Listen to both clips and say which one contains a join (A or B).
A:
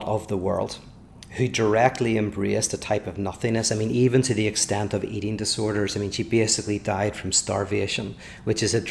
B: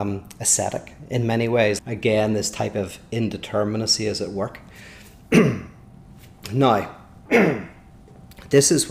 B